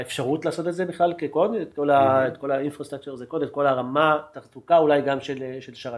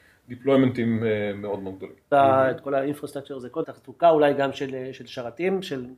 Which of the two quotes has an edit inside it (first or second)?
second